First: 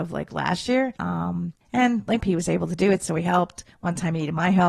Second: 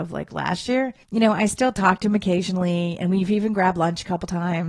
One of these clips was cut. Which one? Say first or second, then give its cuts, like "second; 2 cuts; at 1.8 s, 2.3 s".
first; 2 cuts; at 1.0 s, 2.2 s